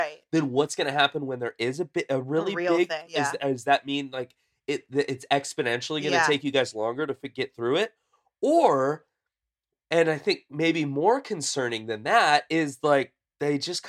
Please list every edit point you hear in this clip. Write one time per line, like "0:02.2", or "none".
0:03.1